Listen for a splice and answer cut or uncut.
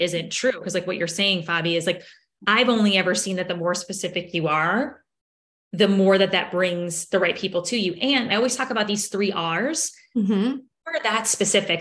uncut